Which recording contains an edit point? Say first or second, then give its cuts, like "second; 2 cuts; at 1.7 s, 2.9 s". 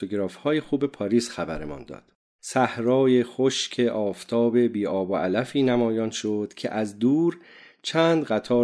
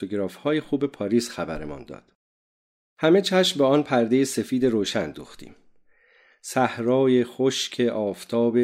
first; 1 cut; at 2.4 s